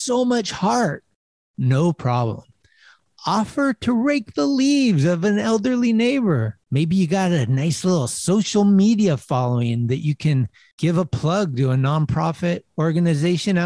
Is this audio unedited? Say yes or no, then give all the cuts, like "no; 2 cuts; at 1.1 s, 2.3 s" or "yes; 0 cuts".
no; 1 cut; at 6.7 s